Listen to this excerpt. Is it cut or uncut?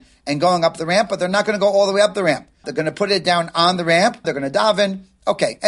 cut